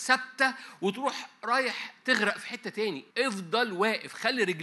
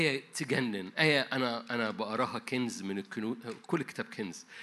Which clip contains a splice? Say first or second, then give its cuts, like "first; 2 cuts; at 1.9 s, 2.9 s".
first; 1 cut; at 3.1 s